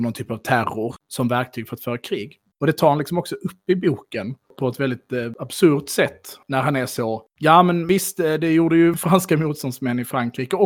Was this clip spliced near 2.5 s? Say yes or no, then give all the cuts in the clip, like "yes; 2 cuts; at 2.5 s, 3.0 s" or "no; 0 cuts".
yes; 1 cut; at 2.5 s